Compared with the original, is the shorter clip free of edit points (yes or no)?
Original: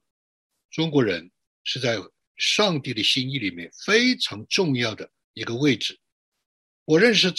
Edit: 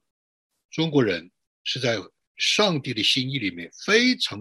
yes